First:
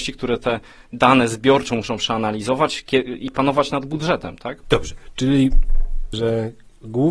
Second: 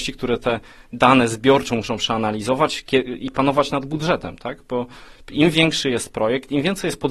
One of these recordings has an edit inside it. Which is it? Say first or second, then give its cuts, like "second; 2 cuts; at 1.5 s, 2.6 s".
first; 2 cuts; at 4.6 s, 6.1 s